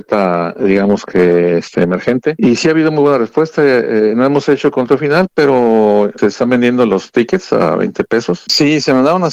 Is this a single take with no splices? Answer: yes; 0 cuts

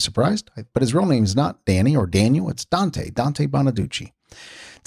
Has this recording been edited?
no; 0 cuts

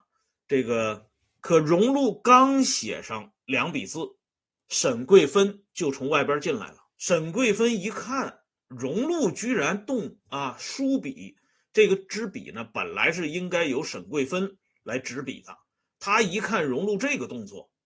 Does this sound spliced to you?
yes; 2 cuts; at 1.4 s, 6.9 s

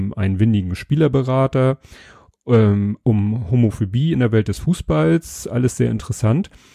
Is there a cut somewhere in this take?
no; 0 cuts

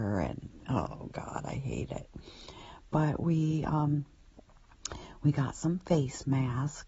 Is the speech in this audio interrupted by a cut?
no; 0 cuts

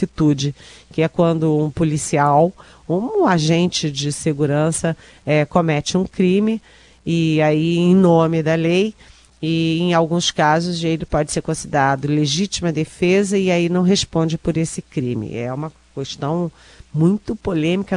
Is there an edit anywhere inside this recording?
no; 0 cuts

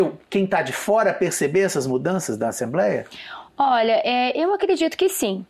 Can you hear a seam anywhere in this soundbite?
no; 0 cuts

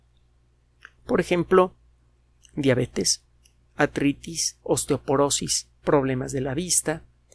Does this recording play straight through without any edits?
yes; 0 cuts

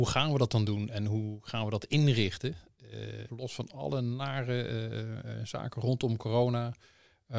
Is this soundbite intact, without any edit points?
no; 1 cut; at 3.3 s

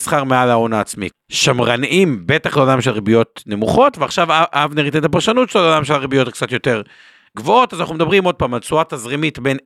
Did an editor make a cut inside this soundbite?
yes; 1 cut; at 1.1 s

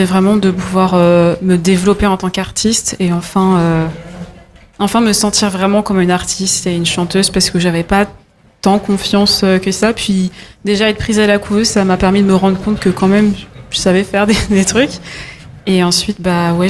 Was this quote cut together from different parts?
no; 0 cuts

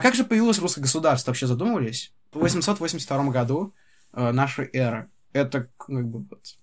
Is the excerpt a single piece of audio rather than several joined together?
no; 1 cut; at 2.3 s

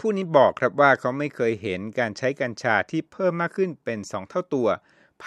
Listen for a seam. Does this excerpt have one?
no; 0 cuts

